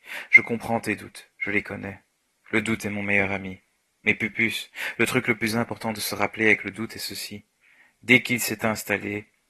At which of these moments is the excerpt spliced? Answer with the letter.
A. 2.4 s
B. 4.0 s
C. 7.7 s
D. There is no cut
D